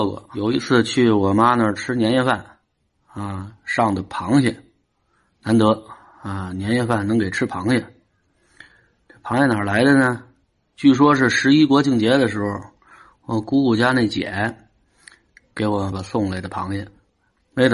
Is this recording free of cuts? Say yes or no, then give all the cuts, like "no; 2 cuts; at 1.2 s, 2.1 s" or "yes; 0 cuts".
no; 1 cut; at 15.9 s